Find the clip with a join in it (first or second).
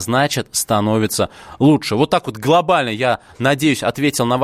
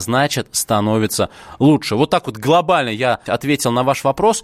second